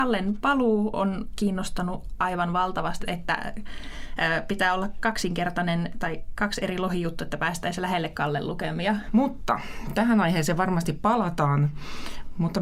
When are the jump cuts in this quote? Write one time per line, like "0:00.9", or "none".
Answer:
0:03.0
0:09.1